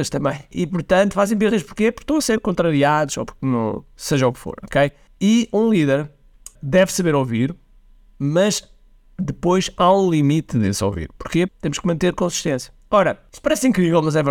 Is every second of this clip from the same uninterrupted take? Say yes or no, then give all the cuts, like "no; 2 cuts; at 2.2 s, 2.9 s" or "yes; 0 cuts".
no; 1 cut; at 11.5 s